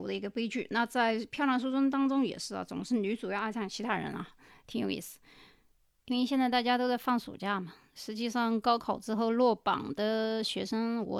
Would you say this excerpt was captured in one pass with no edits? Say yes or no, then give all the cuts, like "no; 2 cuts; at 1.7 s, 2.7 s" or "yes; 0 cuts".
yes; 0 cuts